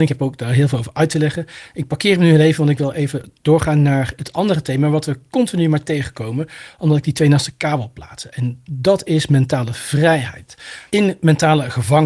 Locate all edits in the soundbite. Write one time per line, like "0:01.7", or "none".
0:10.9

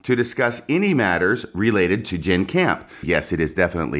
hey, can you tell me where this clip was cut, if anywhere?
0:03.0

